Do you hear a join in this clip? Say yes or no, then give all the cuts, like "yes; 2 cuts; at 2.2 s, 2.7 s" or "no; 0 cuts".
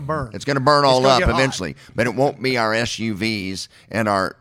no; 0 cuts